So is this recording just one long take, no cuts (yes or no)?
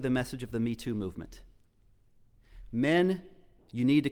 yes